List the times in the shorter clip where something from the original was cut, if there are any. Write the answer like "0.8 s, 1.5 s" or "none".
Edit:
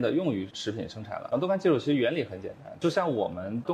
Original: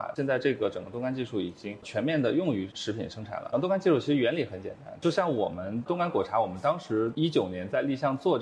none